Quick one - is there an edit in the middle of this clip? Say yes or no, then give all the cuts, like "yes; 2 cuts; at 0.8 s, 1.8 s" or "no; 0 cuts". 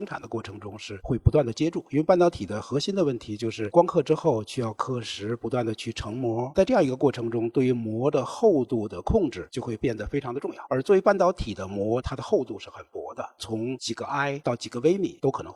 no; 0 cuts